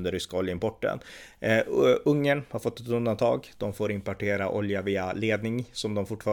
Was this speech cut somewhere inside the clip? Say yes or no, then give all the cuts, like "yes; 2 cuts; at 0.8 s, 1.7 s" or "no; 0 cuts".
no; 0 cuts